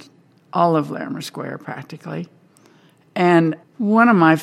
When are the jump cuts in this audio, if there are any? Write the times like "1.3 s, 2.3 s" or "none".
none